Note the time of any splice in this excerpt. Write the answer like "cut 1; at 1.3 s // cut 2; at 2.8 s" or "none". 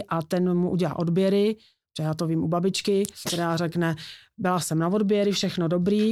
none